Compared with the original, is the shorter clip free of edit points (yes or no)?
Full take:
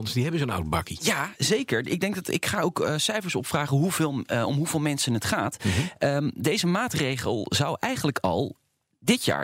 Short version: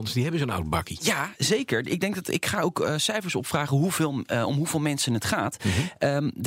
yes